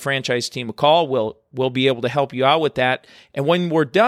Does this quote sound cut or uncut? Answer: uncut